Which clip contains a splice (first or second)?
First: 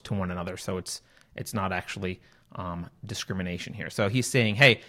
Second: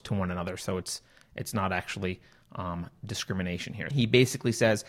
second